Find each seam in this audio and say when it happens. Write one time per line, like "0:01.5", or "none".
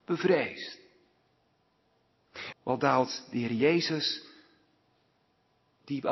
0:02.5